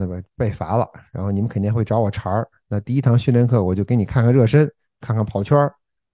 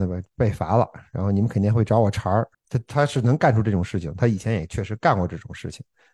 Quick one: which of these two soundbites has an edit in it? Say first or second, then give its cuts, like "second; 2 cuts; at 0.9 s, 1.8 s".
second; 1 cut; at 2.5 s